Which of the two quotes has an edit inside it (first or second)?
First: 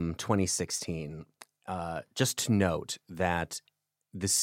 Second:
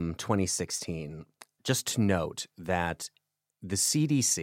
second